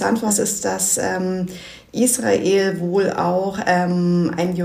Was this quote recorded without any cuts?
yes; 0 cuts

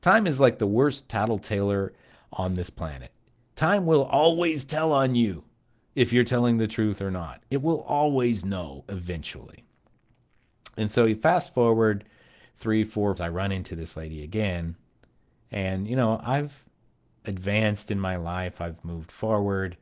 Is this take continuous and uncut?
no; 1 cut; at 13.2 s

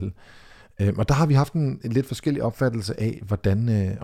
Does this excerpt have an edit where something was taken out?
no; 0 cuts

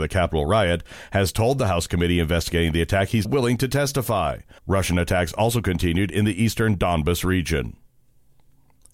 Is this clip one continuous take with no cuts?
no; 2 cuts; at 3.2 s, 4.6 s

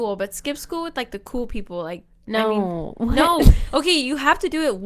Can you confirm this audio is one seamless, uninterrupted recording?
yes; 0 cuts

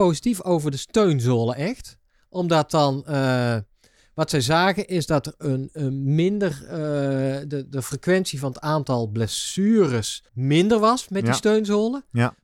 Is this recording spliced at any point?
yes; 1 cut; at 10.3 s

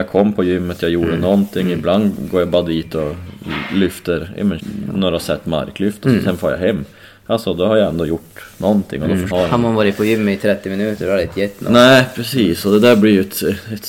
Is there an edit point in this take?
yes; 2 cuts; at 4.6 s, 9.3 s

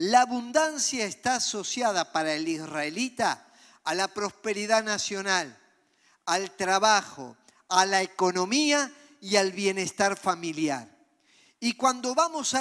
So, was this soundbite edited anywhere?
no; 0 cuts

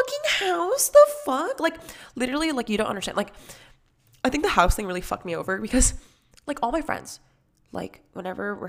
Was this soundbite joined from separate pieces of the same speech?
no; 0 cuts

